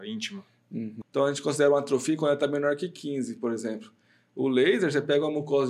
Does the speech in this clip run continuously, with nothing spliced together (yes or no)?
no